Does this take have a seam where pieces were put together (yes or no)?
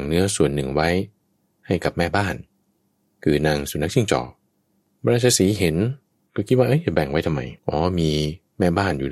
yes